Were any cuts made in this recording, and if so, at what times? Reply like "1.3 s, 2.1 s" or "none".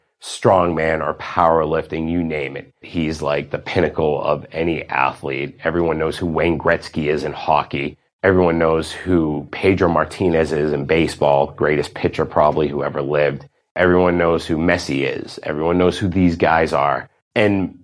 2.8 s

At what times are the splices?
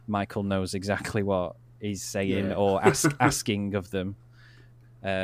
none

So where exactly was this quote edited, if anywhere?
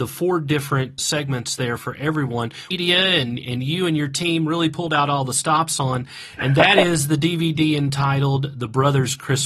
2.7 s

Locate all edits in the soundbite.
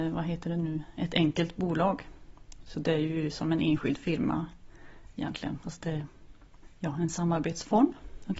none

